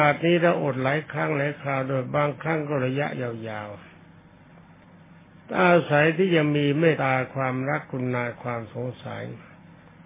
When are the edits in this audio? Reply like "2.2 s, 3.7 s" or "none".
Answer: 6.9 s